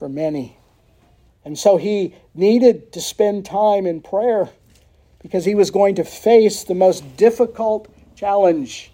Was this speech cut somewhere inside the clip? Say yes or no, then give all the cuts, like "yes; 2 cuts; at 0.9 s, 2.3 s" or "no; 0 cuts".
yes; 1 cut; at 1.3 s